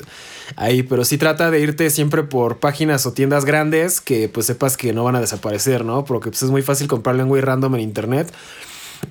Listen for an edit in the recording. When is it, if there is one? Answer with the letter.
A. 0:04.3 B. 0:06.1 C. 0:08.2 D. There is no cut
D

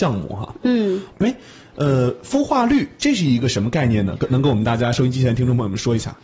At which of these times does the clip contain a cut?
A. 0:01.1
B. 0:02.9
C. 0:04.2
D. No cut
A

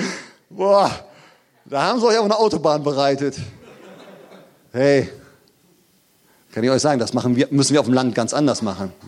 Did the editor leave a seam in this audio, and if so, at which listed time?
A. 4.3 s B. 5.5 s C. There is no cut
C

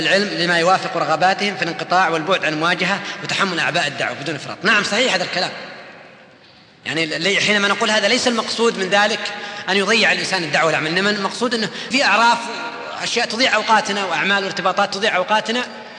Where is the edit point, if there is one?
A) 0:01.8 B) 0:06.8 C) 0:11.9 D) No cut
C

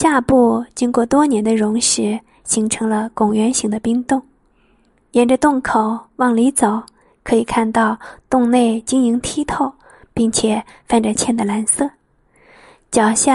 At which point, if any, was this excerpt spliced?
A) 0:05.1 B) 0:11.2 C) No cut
B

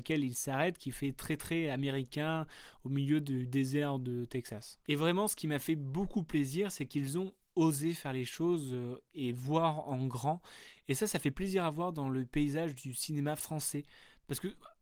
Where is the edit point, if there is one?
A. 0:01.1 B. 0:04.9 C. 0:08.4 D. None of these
B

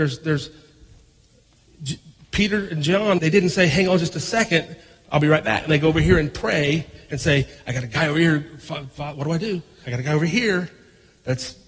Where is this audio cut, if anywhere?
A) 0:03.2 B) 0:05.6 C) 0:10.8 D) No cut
A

